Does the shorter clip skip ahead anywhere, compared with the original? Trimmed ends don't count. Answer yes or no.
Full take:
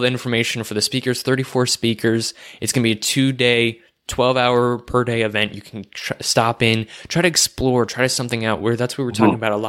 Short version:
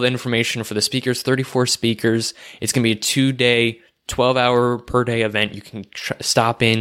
no